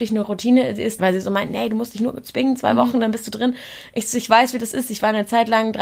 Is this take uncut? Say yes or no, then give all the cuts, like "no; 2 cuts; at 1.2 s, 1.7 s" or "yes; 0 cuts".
no; 1 cut; at 1.0 s